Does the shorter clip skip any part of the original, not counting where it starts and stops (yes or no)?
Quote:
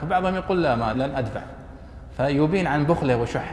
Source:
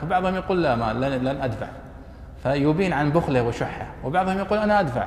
yes